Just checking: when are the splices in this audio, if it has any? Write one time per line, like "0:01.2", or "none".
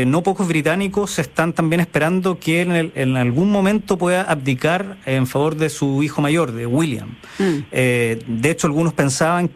none